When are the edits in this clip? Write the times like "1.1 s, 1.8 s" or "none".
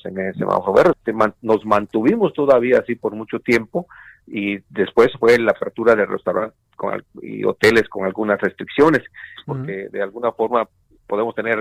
0.9 s, 9.4 s

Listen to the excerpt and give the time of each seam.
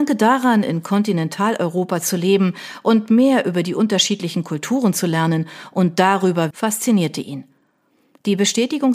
6.5 s

